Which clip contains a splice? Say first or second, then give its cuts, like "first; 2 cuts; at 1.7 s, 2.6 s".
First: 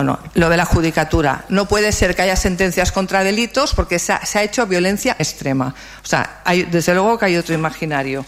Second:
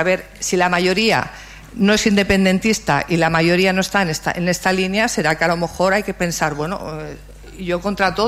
first; 1 cut; at 5.2 s